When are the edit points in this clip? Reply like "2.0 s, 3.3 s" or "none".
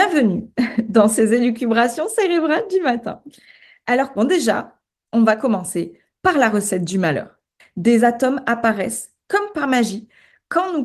4.2 s, 7.6 s